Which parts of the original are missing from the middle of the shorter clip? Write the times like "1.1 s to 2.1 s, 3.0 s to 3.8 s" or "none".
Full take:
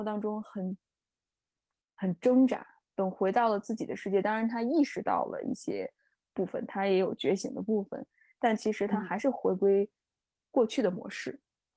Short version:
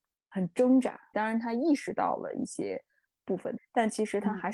2.8 s to 4.2 s, 6.7 s to 8.2 s